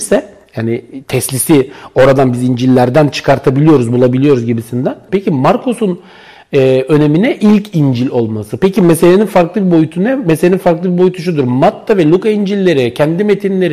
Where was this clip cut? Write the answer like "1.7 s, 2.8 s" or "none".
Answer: 5.1 s